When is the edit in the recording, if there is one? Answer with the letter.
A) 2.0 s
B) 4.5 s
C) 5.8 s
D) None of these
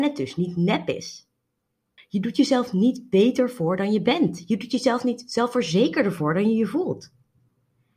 A